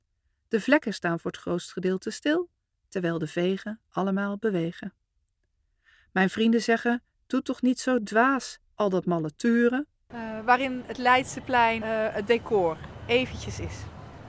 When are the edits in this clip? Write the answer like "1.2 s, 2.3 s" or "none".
8.6 s, 10.1 s, 11.8 s